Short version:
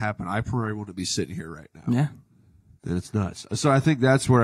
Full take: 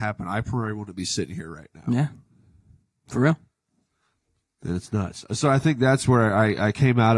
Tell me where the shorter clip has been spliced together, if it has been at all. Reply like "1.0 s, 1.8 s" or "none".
2.8 s